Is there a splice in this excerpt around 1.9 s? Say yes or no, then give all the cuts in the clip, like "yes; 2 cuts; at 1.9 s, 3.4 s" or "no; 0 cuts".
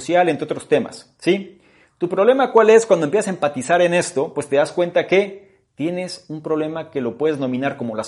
no; 0 cuts